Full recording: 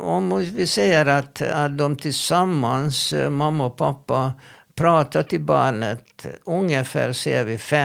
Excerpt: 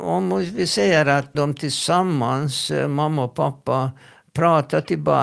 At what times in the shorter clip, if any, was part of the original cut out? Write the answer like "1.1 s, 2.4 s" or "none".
1.3 s